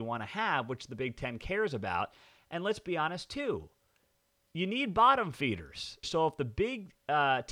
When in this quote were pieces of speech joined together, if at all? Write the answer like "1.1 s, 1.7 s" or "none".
6.0 s